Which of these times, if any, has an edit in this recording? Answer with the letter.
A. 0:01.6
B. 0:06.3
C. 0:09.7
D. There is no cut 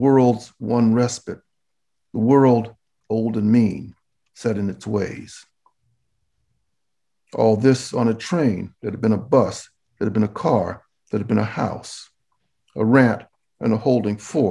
D